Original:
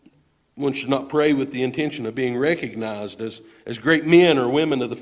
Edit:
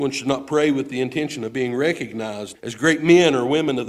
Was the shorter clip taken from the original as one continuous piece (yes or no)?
no